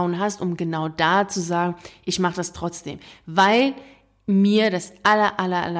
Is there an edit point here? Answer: no; 0 cuts

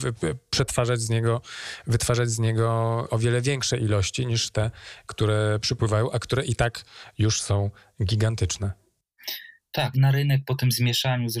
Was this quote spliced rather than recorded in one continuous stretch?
yes; 1 cut; at 9.9 s

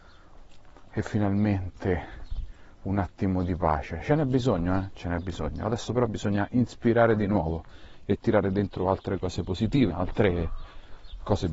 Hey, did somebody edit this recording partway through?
yes; 1 cut; at 9.9 s

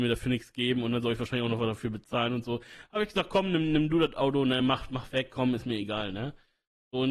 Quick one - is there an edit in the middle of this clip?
no; 0 cuts

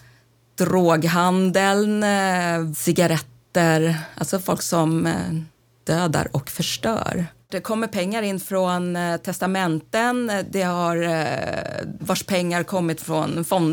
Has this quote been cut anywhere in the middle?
yes; 3 cuts; at 2.7 s, 7.5 s, 12.0 s

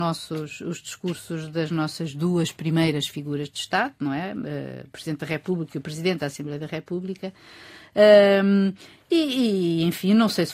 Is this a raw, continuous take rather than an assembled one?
yes; 0 cuts

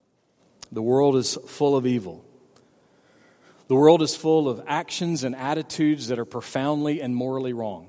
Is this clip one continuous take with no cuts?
yes; 0 cuts

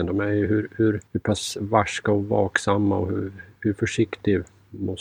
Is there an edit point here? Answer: yes; 1 cut; at 1.1 s

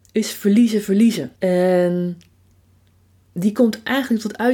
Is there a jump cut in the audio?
yes; 1 cut; at 1.4 s

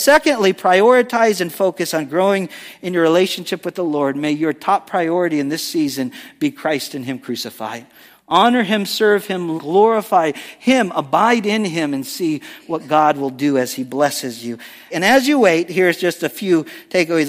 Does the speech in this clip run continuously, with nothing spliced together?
no; 2 cuts; at 9.6 s, 14.9 s

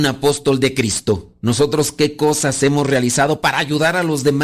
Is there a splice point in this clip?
no; 0 cuts

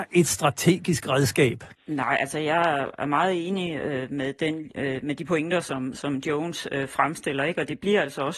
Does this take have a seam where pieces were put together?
yes; 1 cut; at 1.7 s

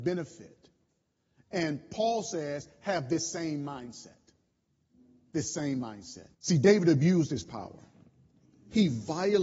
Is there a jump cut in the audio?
yes; 1 cut; at 6.3 s

